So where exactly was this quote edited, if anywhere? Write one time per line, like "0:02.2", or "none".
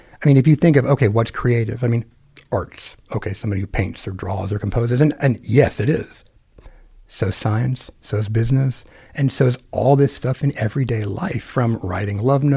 none